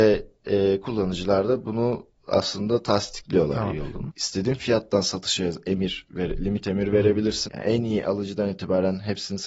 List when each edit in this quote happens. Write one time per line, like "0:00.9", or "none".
0:04.1
0:07.5